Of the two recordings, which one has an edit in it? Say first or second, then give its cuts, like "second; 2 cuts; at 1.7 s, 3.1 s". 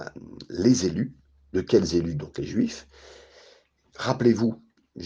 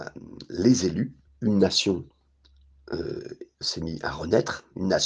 second; 2 cuts; at 1.3 s, 3.6 s